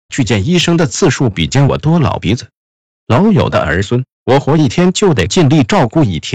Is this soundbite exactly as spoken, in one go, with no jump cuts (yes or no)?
no